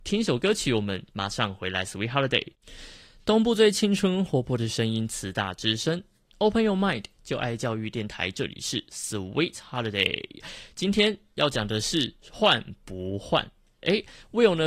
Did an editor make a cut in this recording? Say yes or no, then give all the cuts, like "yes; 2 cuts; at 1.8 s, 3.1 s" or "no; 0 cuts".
no; 0 cuts